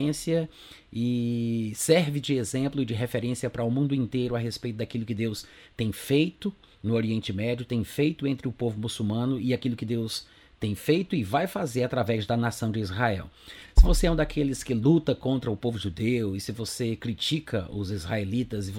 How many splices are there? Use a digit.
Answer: 0